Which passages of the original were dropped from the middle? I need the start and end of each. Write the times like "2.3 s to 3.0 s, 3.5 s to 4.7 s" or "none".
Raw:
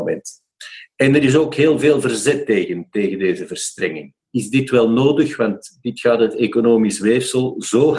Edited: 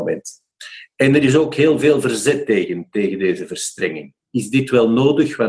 none